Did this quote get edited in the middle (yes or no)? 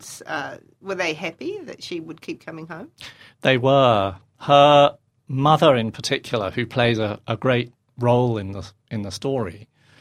no